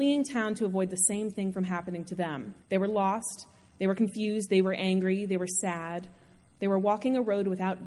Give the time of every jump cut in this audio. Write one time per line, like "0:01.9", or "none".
0:02.6